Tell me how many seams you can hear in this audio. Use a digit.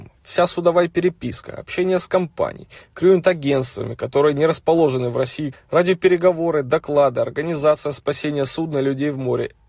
1